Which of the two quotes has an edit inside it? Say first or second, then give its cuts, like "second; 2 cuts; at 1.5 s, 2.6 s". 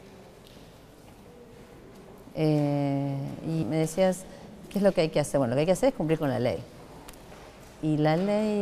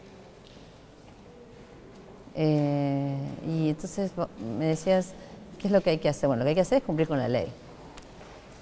first; 1 cut; at 3.6 s